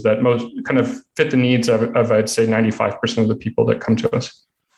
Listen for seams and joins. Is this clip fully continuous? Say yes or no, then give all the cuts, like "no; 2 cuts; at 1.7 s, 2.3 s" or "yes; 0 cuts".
yes; 0 cuts